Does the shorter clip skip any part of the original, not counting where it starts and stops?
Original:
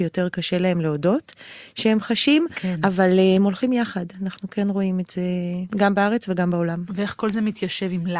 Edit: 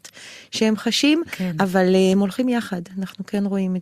no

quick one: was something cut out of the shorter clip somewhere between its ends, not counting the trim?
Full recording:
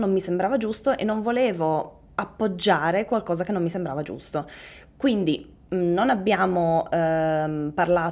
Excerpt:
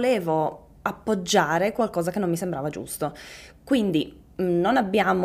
no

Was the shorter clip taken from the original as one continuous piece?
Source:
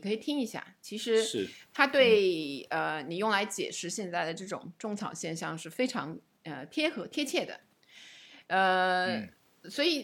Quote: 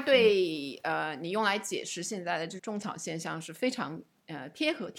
no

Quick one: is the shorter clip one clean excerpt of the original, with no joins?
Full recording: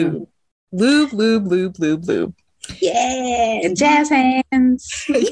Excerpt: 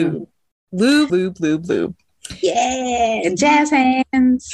no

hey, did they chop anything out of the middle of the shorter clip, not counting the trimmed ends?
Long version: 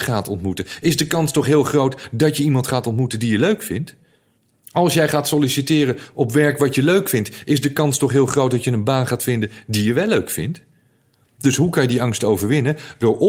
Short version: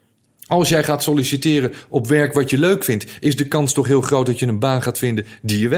no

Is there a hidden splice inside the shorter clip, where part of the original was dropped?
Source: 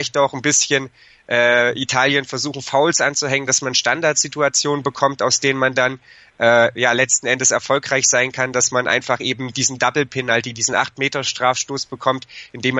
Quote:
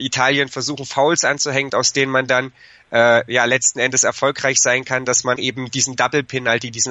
yes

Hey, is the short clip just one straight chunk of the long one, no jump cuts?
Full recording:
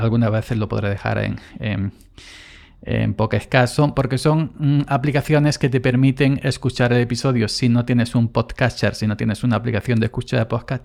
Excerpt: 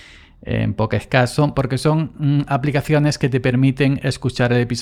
yes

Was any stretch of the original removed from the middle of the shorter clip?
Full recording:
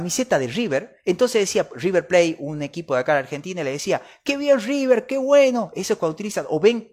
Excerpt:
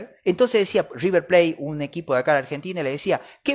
no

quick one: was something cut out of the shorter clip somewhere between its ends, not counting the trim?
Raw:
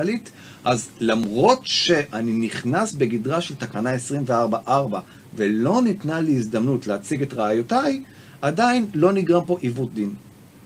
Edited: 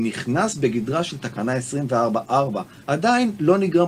yes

